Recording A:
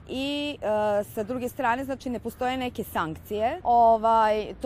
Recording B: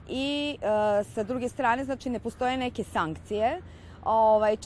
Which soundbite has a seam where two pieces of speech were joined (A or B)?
A